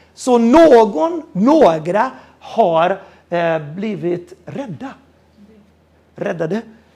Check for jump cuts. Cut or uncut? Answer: uncut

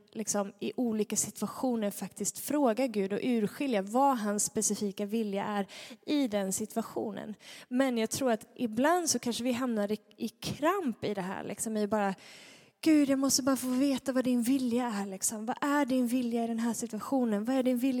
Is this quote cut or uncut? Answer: uncut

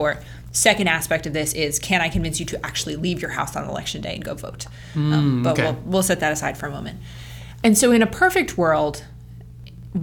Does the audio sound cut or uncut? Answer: uncut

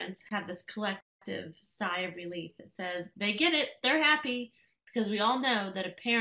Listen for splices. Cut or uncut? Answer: uncut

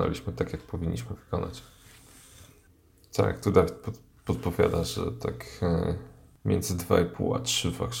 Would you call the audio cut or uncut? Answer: uncut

